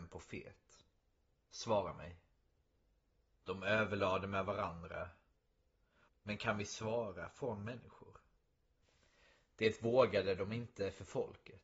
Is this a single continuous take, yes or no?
no